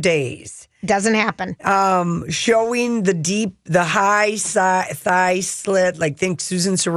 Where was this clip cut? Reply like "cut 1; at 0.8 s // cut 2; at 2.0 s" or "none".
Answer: none